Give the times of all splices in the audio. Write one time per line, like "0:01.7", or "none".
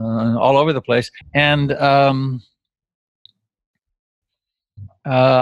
0:01.2